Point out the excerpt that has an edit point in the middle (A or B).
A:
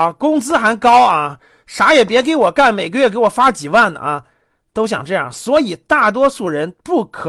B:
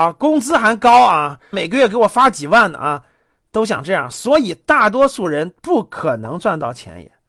B